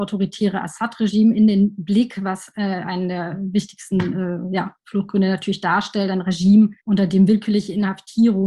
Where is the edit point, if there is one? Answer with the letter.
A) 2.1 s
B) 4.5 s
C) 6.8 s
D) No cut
C